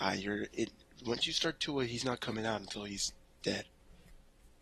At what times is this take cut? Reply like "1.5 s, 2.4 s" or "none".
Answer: none